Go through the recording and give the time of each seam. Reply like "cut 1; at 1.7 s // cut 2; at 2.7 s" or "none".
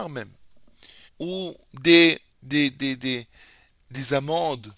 cut 1; at 1.1 s // cut 2; at 2.3 s